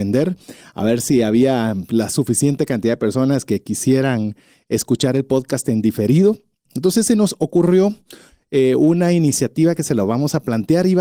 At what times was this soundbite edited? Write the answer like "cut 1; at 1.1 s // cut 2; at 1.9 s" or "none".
cut 1; at 6.6 s